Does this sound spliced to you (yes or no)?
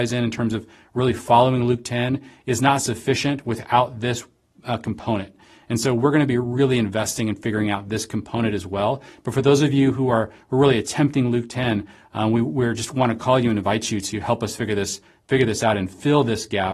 no